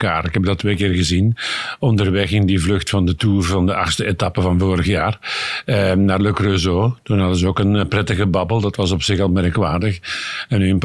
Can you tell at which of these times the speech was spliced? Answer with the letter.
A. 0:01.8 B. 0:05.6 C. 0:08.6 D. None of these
D